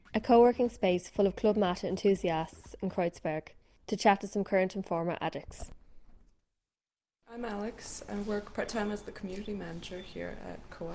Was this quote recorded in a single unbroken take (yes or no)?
yes